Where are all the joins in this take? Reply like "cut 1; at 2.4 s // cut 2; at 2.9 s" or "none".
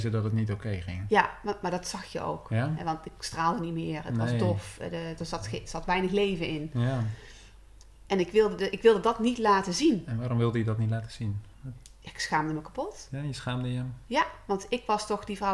none